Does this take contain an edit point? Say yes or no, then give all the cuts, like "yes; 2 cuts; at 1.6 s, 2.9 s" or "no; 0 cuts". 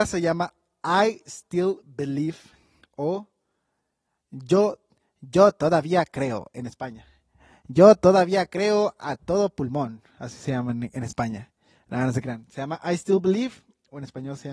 no; 0 cuts